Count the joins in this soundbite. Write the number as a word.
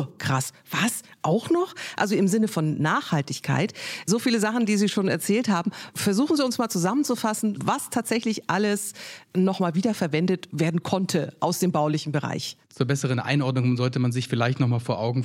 one